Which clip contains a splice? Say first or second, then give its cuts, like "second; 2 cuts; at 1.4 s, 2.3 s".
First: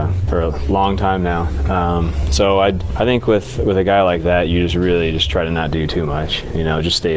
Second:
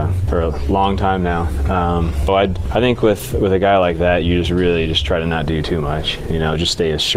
second; 1 cut; at 2.3 s